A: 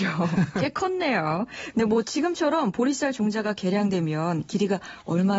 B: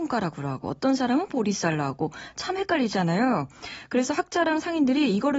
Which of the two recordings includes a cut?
A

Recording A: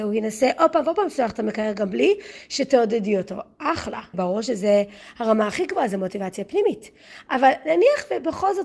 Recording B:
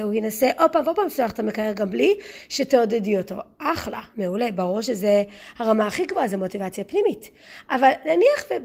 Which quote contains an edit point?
A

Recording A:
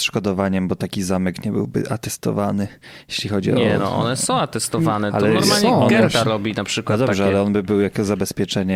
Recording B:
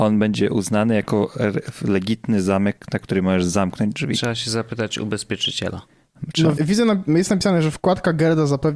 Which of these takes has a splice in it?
B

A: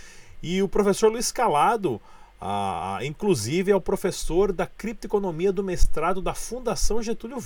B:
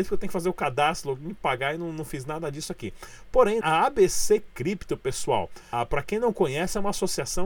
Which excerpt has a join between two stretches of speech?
B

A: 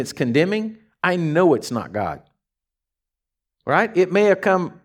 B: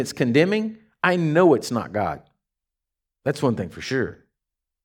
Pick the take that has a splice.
B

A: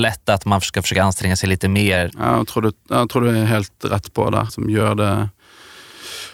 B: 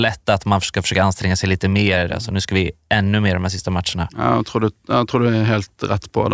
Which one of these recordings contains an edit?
A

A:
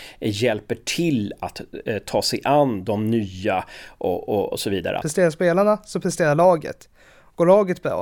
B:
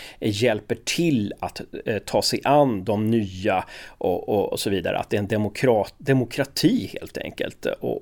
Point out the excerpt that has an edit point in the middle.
A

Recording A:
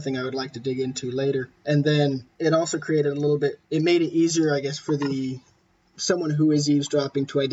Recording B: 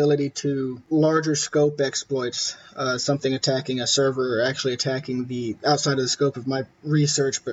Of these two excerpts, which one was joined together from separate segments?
B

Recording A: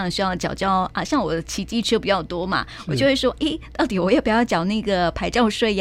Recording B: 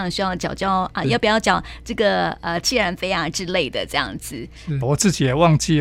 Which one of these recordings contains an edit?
B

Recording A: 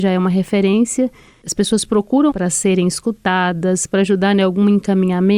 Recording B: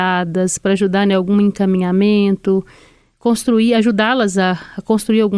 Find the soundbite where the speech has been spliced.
A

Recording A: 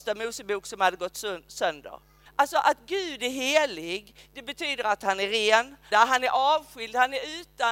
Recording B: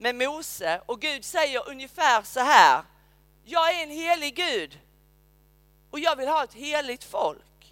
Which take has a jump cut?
A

